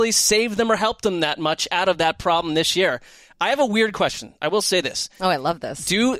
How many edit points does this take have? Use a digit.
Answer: 0